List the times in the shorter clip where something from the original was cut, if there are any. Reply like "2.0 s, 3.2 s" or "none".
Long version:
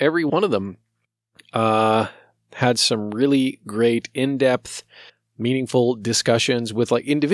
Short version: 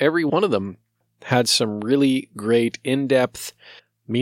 1.0 s